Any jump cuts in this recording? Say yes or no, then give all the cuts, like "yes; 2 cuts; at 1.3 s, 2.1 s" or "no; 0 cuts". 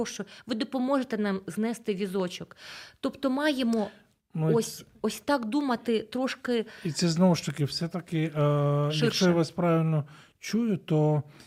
no; 0 cuts